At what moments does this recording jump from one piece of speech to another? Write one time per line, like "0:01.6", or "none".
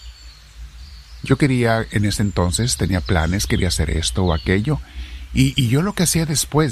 none